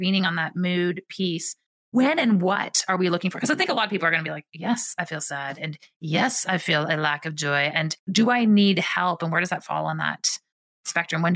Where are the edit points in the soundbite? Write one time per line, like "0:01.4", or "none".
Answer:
0:08.0